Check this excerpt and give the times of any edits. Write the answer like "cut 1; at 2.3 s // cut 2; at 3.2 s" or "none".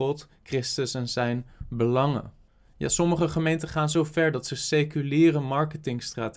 none